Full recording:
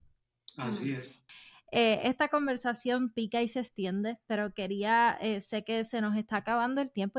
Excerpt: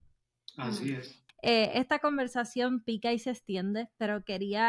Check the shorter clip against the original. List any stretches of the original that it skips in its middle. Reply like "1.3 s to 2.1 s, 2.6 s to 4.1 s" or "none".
1.3 s to 1.6 s